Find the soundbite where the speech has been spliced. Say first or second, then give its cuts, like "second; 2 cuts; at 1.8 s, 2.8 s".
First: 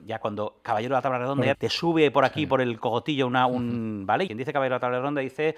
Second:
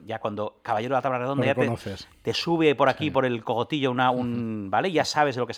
first; 2 cuts; at 1.5 s, 4.3 s